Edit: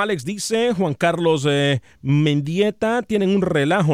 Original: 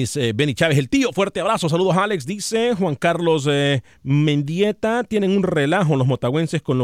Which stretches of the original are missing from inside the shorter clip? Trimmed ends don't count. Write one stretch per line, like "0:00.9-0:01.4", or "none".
none